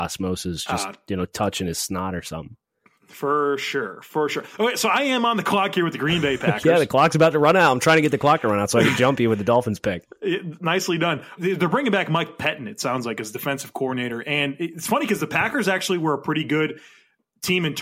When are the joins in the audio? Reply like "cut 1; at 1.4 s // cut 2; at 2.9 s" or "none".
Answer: cut 1; at 11.4 s